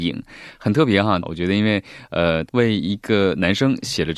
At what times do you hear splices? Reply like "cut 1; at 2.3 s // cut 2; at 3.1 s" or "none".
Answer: cut 1; at 1.2 s // cut 2; at 2.5 s